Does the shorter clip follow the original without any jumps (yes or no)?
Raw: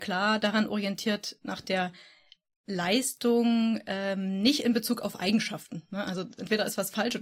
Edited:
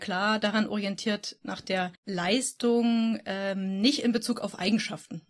no